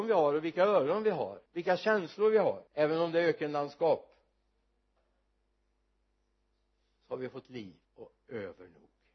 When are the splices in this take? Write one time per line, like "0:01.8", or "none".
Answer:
0:01.5
0:02.7
0:07.8